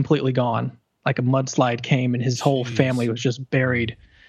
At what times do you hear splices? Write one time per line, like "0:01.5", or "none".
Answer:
none